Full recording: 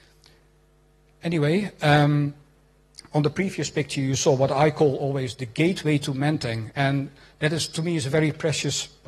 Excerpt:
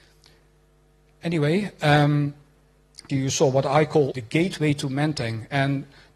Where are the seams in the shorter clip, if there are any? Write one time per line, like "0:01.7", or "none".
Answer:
0:03.1
0:04.1